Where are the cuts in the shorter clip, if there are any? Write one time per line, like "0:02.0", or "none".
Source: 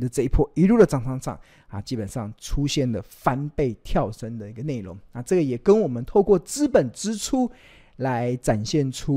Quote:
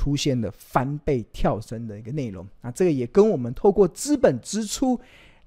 none